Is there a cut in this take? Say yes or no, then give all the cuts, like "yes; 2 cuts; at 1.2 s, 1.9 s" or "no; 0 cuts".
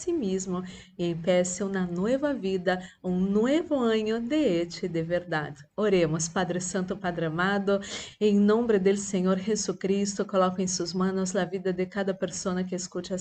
no; 0 cuts